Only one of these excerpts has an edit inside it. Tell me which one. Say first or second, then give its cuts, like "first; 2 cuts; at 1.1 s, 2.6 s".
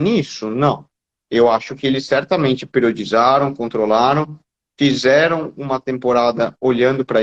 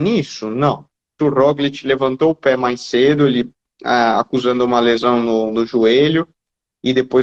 second; 1 cut; at 1.2 s